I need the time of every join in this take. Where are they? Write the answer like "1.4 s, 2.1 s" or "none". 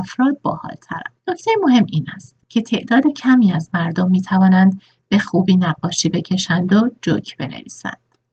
1.2 s, 2.4 s